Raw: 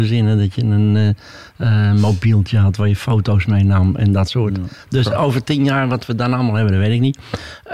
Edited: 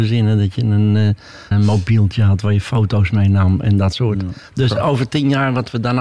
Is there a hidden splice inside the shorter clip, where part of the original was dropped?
yes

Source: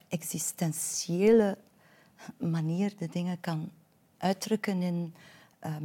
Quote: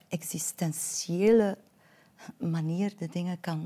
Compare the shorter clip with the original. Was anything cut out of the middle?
no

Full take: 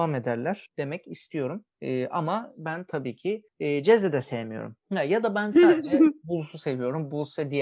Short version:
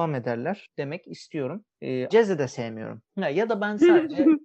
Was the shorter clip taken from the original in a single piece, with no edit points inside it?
no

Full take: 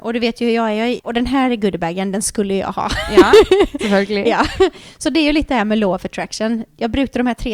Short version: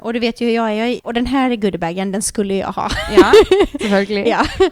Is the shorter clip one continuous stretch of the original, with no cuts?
yes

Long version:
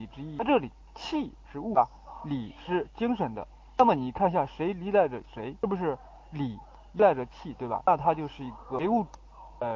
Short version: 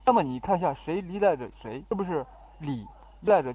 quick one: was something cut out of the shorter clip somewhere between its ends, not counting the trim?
no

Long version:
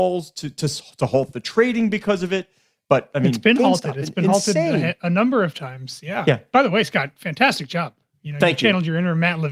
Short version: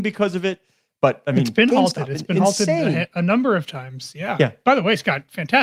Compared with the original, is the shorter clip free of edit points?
yes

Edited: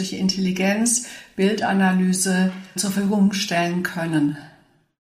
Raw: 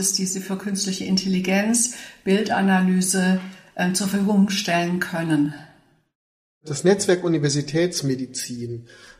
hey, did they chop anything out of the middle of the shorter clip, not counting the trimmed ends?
yes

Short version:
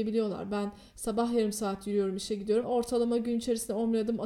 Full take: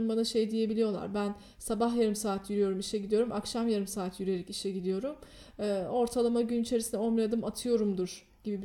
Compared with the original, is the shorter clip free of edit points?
no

